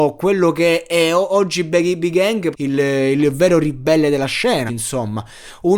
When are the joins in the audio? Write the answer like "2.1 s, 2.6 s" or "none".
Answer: 2.5 s, 4.7 s